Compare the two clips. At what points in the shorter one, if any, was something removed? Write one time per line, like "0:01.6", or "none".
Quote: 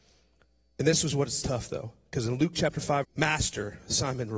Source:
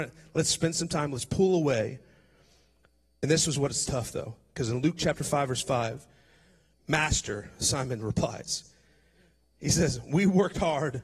0:03.0

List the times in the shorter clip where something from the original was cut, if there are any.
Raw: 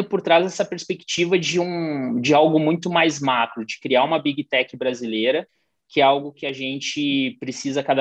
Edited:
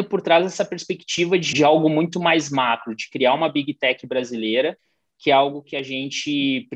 0:01.5

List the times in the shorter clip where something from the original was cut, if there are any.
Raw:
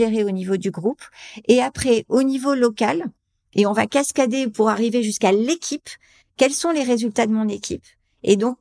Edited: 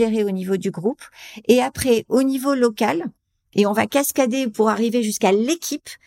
none

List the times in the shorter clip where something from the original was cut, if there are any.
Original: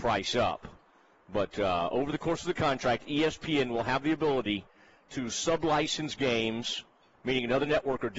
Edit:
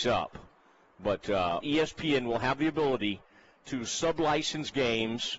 0:01.6

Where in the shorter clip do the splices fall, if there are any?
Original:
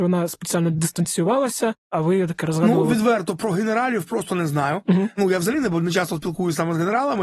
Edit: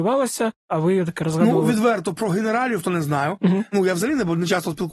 0:02.8

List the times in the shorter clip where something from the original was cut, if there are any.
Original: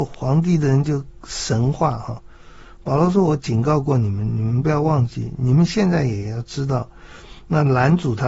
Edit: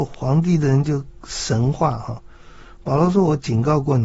none

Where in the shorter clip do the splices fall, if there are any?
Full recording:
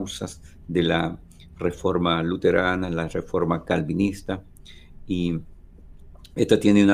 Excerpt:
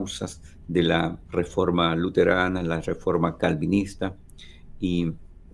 0:01.2

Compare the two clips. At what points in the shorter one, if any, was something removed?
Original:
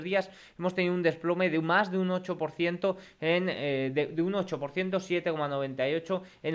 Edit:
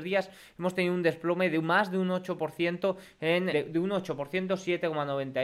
0:03.5

